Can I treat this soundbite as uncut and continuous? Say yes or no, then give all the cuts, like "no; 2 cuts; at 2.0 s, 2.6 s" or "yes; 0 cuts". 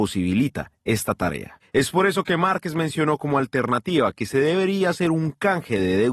yes; 0 cuts